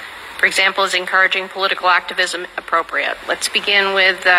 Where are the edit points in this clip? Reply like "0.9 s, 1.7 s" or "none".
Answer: none

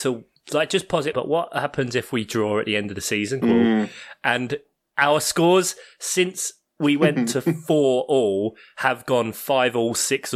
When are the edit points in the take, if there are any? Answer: 1.1 s, 3.4 s

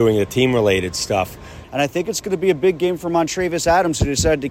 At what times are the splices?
1.6 s

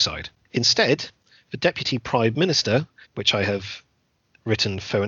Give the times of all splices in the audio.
3.0 s

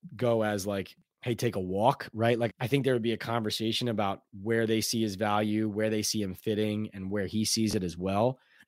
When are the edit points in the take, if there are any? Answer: 2.5 s

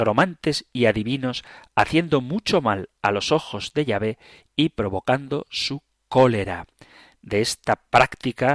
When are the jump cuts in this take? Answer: none

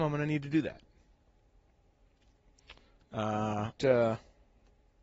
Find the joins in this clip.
3.8 s

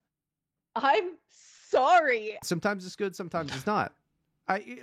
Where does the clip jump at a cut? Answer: 2.4 s

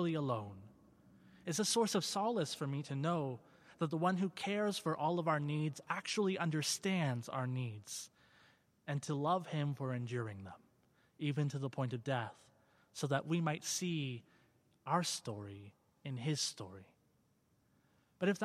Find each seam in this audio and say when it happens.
none

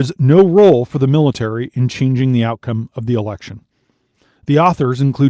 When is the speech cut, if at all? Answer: none

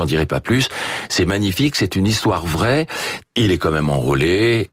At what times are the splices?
3.2 s

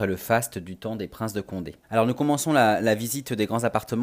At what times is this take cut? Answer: 1.8 s

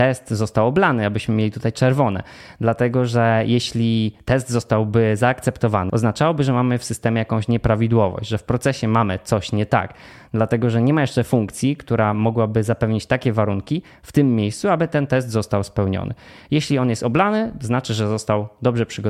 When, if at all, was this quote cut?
5.9 s

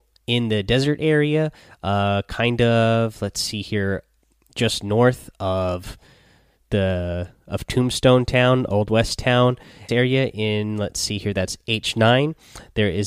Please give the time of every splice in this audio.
9.9 s

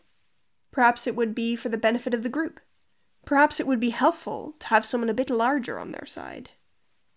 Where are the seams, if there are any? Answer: none

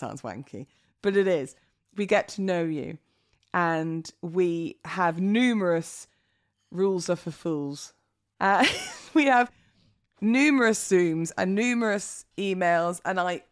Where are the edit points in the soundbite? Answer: 8.3 s

